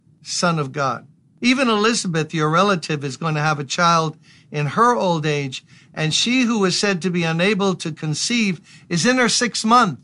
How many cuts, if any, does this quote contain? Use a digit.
0